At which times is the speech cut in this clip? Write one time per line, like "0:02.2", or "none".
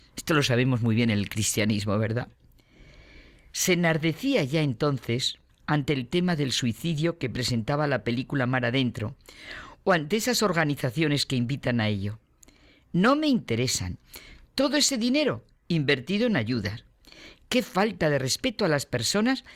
0:05.5